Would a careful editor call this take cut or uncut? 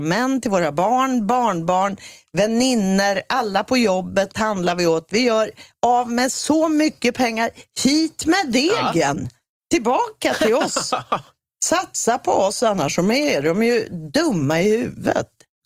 uncut